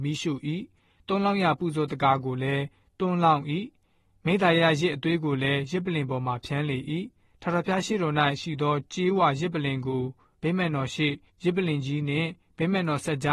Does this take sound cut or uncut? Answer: uncut